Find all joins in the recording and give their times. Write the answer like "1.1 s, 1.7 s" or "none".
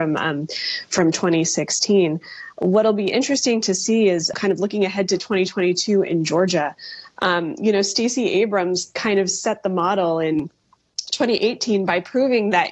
4.3 s